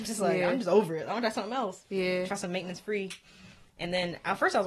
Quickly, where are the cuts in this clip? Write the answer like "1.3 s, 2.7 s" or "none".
none